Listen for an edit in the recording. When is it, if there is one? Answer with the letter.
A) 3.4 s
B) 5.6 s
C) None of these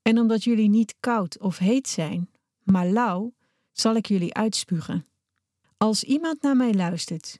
B